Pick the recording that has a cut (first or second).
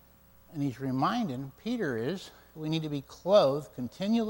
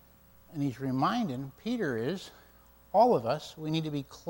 first